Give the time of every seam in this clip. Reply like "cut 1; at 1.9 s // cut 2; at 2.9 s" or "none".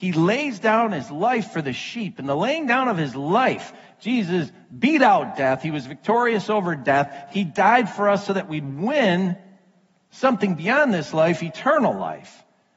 none